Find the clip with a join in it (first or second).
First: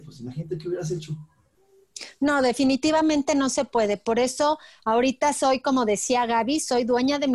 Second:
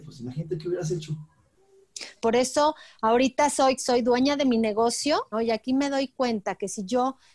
second